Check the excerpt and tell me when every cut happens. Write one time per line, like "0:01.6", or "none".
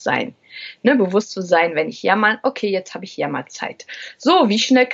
none